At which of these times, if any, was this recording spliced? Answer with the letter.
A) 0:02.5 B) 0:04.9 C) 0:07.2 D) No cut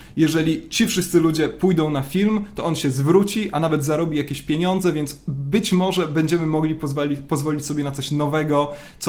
D